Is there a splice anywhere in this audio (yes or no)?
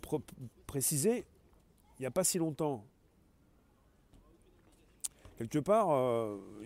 no